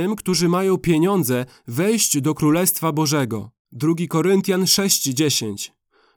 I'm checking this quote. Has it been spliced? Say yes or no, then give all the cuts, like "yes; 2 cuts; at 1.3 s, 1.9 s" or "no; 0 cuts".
yes; 1 cut; at 3.6 s